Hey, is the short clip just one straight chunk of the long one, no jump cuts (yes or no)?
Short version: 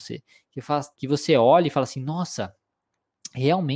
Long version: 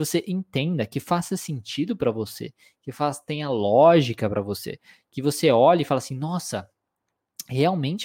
no